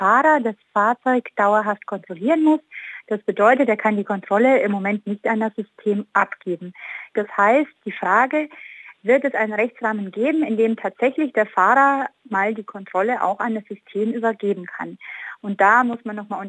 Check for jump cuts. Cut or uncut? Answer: cut